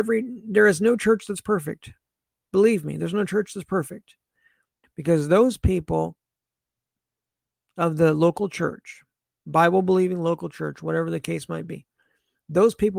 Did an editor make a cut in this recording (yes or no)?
yes